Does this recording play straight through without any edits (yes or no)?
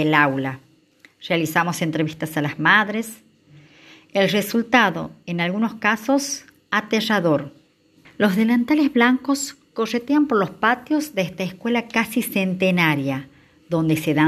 no